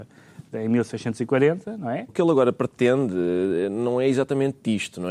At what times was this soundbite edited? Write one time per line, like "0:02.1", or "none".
0:02.1